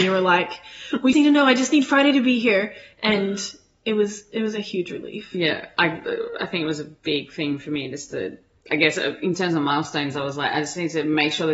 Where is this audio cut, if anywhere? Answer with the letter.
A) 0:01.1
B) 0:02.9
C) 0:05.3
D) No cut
A